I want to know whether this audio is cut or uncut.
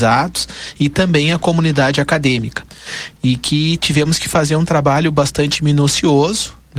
cut